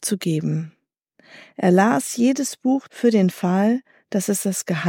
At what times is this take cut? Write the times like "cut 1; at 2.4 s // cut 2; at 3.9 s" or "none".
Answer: cut 1; at 2.9 s

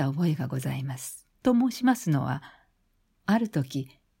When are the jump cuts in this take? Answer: cut 1; at 1.3 s

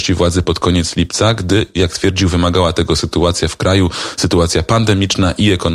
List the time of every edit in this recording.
none

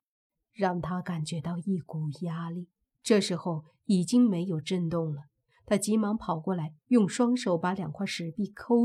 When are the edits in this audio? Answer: cut 1; at 2.9 s

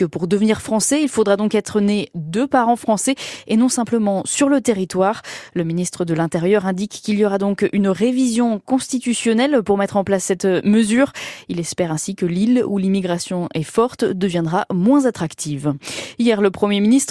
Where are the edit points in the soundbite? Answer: none

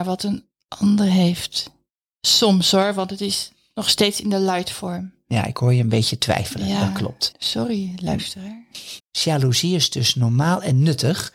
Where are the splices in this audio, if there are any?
cut 1; at 7.3 s // cut 2; at 9.0 s

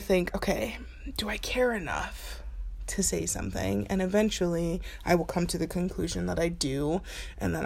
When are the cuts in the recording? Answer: none

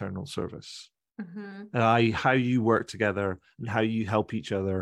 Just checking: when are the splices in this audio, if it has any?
none

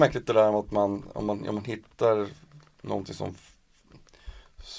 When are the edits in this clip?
none

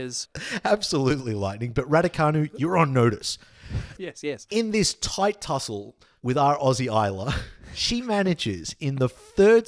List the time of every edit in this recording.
cut 1; at 4.0 s

